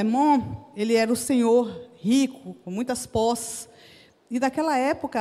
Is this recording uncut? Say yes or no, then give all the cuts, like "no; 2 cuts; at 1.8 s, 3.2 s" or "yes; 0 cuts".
yes; 0 cuts